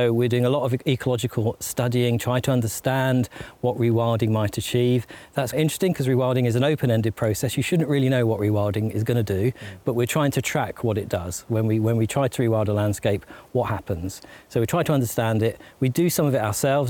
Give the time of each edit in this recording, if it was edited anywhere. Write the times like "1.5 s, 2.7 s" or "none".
5.5 s